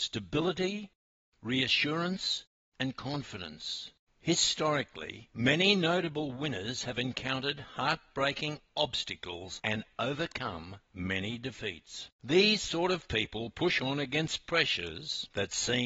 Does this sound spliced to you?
yes; 1 cut; at 4.1 s

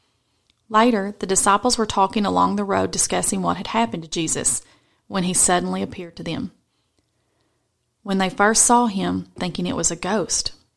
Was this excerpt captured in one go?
no; 1 cut; at 9.4 s

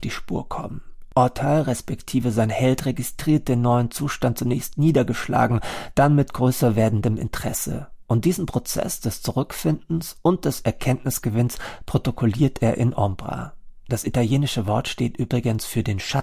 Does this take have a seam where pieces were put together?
no; 0 cuts

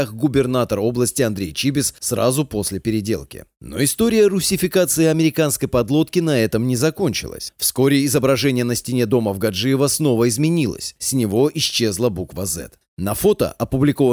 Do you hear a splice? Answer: no; 0 cuts

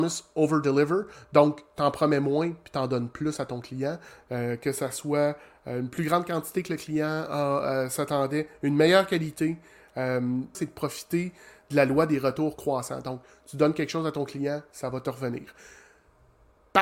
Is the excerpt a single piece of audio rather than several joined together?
no; 1 cut; at 10.5 s

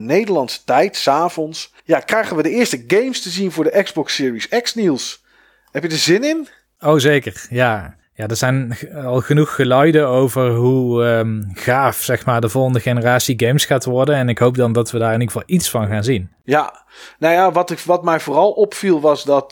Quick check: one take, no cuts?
no; 1 cut; at 1.8 s

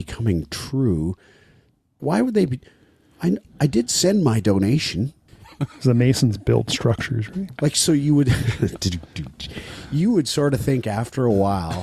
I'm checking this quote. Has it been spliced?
yes; 2 cuts; at 2.0 s, 5.3 s

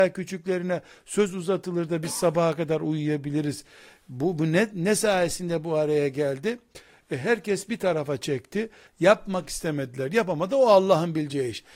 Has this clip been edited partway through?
yes; 1 cut; at 8.9 s

